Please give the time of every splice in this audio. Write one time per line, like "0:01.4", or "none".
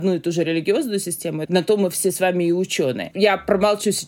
0:01.4
0:03.1